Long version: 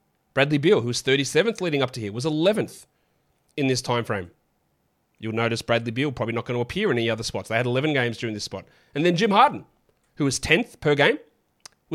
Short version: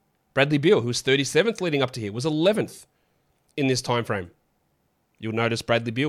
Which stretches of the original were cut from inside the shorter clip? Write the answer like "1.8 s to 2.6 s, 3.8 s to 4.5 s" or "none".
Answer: none